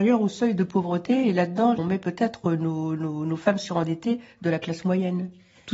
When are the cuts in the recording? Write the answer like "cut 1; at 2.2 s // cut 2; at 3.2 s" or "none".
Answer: none